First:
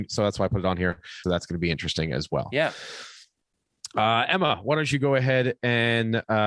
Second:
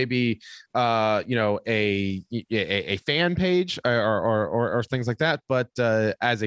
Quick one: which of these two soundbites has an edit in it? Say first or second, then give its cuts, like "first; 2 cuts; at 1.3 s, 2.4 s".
first; 1 cut; at 1.2 s